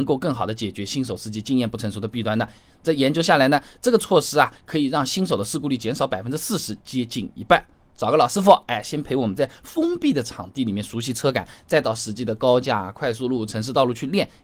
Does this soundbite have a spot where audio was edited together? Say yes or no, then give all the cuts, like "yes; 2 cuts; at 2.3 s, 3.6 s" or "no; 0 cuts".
no; 0 cuts